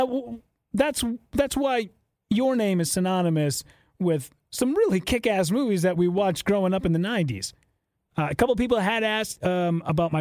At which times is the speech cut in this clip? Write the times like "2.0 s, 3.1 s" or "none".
8.1 s